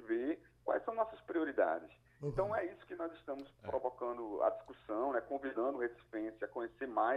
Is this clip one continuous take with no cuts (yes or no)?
yes